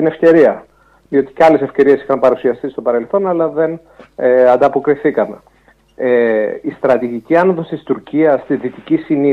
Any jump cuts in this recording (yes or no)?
no